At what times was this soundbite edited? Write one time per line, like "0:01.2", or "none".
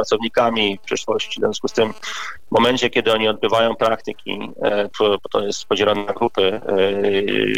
0:04.9